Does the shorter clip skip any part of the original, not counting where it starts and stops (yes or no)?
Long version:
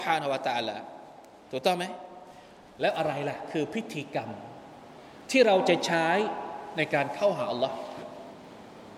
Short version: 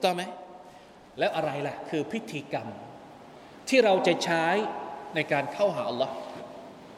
no